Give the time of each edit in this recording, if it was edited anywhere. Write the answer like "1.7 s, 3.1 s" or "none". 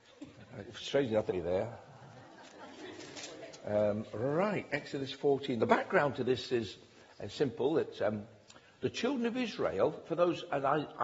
1.3 s